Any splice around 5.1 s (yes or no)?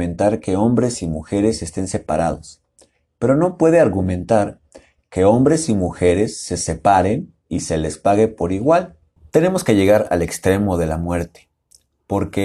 no